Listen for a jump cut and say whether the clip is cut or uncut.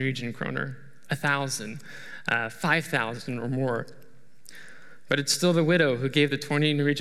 uncut